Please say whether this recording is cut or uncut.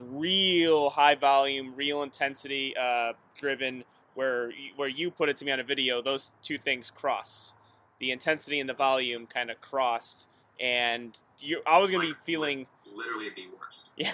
uncut